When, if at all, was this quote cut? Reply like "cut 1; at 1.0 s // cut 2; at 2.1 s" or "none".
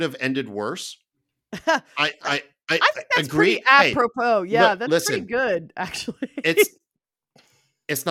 none

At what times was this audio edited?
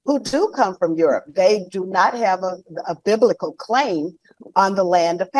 none

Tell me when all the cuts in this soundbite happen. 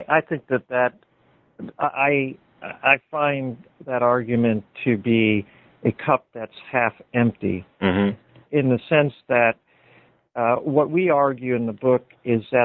none

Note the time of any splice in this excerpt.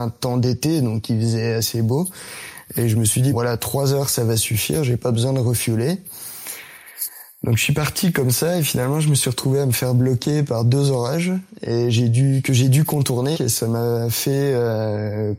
cut 1; at 3.3 s // cut 2; at 13.3 s

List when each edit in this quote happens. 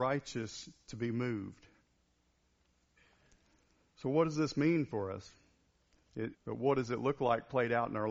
cut 1; at 6.3 s

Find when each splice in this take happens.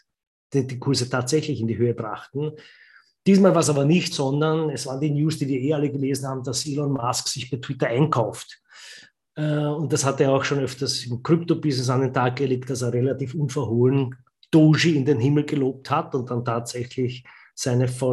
cut 1; at 4.1 s // cut 2; at 9.2 s

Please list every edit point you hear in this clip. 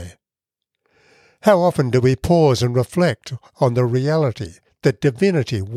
none

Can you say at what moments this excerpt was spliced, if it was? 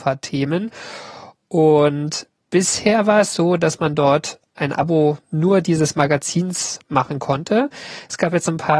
none

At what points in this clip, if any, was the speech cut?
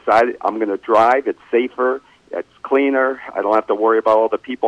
none

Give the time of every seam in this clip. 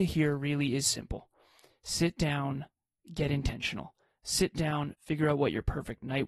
cut 1; at 4.9 s

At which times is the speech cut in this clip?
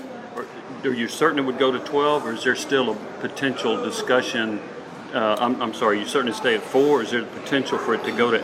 none

